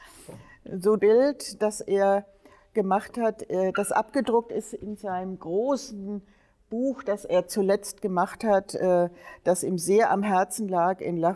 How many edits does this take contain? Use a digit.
1